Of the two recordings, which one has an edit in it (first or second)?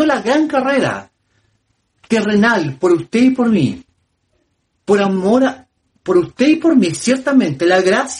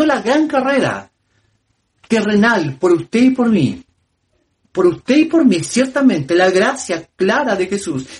second